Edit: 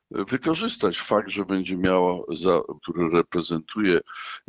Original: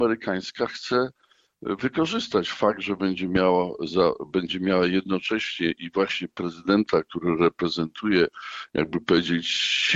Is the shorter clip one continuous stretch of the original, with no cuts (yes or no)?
no